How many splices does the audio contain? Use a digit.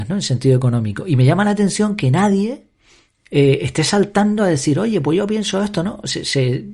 0